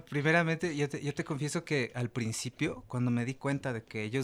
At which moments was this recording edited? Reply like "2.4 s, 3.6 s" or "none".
2.9 s